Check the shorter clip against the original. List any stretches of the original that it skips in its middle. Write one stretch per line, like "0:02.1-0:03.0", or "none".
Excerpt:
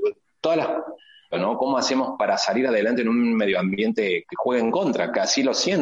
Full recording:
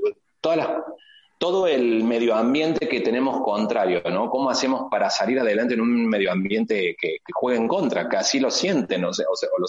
0:01.3-0:04.0
0:07.0-0:07.2